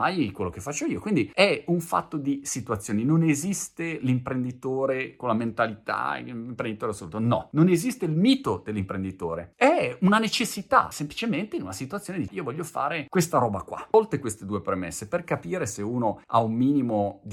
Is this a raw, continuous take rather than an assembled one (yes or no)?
no